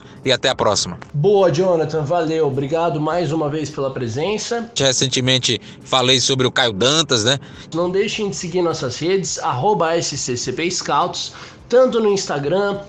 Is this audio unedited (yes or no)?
no